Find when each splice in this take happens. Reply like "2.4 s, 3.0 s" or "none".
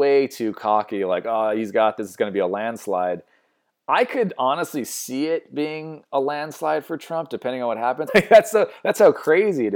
8.1 s